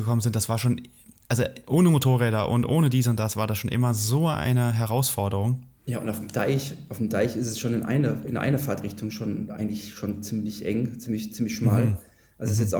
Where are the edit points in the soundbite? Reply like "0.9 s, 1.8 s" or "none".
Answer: none